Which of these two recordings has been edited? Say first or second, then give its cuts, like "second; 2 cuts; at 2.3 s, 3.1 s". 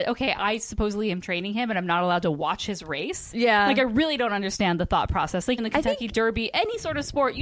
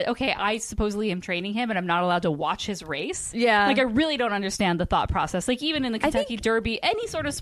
first; 1 cut; at 5.6 s